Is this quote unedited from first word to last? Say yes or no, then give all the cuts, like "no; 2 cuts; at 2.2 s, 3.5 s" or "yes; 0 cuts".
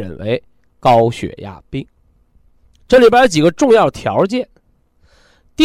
yes; 0 cuts